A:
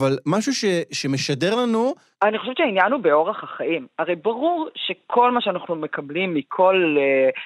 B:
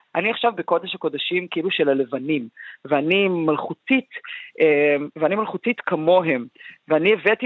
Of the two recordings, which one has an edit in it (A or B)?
A